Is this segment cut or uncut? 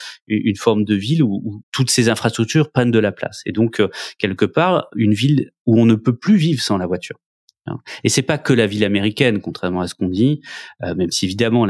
cut